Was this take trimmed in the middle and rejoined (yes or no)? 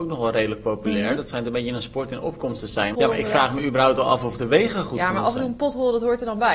yes